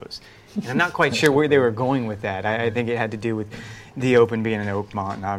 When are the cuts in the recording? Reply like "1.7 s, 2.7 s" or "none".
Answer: none